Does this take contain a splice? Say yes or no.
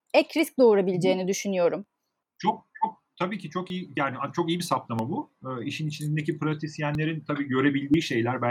no